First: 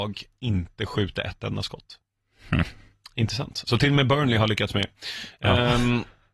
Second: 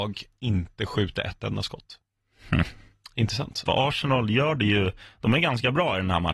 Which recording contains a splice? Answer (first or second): second